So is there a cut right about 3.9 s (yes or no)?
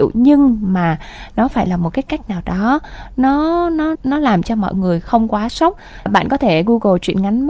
yes